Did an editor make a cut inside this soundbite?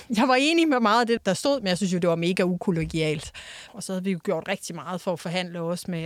yes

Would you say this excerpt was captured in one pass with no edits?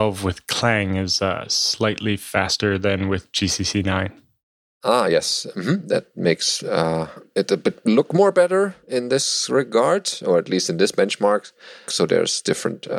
no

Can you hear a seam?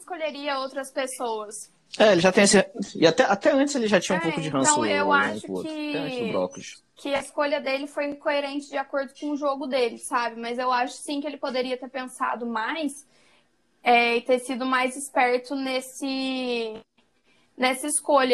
no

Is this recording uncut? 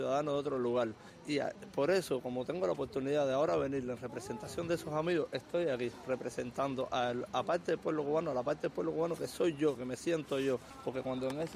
yes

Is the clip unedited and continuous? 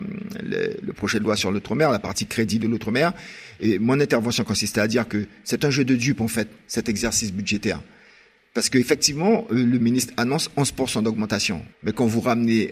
no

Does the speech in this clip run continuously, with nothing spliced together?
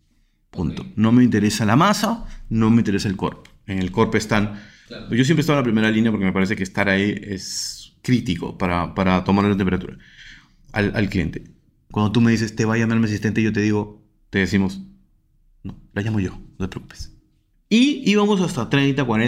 no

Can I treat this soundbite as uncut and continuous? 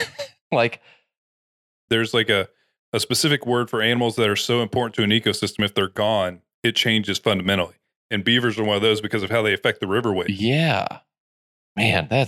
no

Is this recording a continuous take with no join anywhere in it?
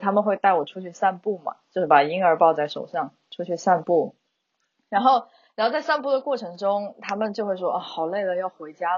yes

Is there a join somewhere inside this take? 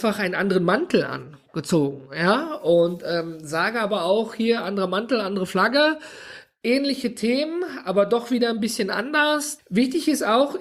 yes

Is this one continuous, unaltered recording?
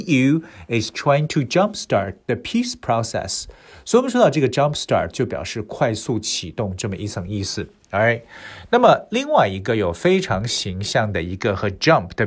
yes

